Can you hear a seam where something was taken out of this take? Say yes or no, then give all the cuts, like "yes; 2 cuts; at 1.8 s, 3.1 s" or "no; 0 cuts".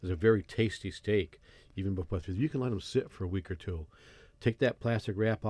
no; 0 cuts